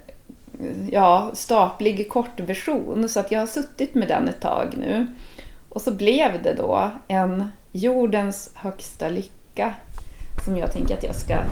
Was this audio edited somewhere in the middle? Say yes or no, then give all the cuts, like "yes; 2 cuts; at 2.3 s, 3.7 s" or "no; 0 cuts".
no; 0 cuts